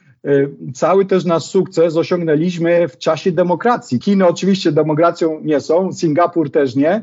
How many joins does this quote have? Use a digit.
1